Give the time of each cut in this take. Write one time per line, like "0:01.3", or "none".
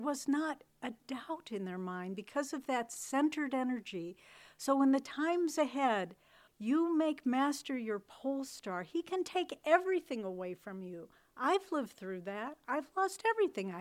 0:06.5